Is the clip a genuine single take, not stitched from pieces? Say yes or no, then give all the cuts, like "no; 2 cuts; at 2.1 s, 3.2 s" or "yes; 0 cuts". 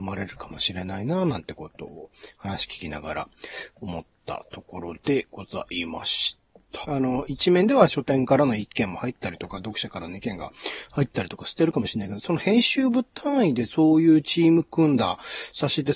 no; 1 cut; at 6.8 s